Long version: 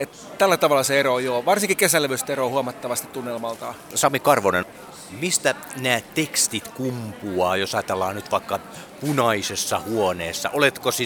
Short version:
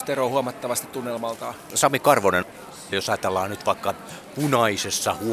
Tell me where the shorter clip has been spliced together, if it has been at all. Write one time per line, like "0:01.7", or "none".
0:02.9

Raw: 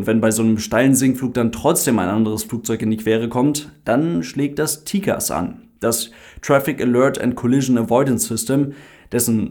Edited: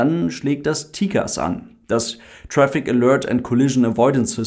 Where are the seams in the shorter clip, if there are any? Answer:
none

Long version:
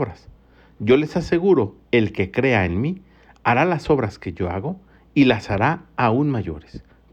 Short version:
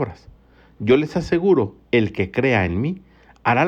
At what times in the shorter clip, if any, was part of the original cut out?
none

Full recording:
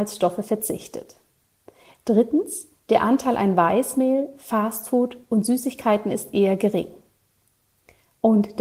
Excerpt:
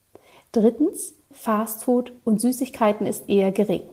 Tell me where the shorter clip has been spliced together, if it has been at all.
0:01.3

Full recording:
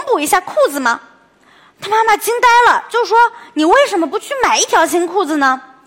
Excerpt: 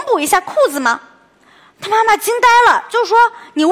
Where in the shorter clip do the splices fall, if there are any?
none

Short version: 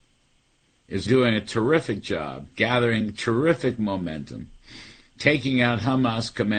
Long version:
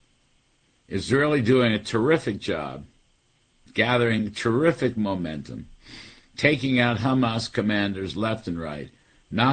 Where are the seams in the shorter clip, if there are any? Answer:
0:01.1
0:02.5

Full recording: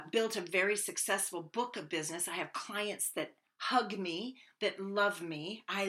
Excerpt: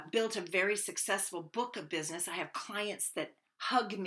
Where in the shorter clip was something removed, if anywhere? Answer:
none

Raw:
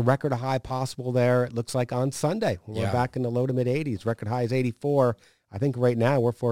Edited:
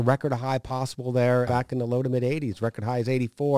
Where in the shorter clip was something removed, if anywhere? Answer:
0:01.5

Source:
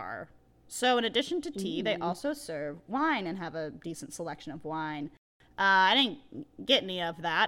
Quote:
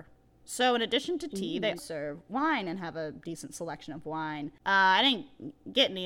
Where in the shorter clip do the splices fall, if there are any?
0:01.8
0:04.6

